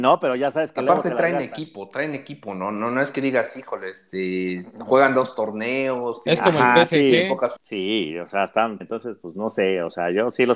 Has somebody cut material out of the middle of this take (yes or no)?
yes